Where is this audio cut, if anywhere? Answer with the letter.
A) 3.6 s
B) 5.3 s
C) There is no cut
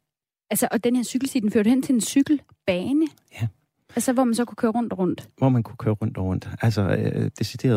C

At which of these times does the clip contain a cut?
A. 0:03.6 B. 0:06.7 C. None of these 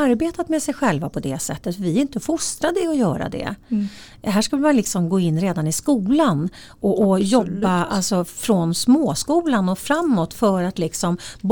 C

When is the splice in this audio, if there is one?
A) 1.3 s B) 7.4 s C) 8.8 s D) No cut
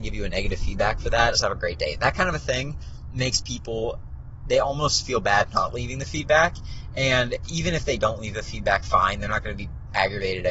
A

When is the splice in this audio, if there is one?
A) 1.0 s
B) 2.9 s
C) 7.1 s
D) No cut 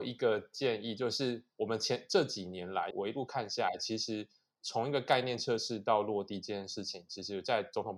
B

